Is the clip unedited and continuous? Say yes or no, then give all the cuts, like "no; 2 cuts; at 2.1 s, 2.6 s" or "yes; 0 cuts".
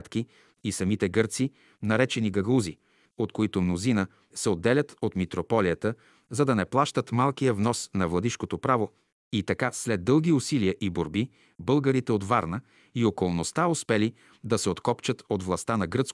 no; 2 cuts; at 3.1 s, 4.3 s